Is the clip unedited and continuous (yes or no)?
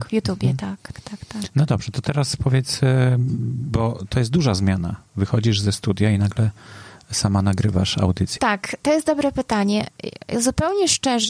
no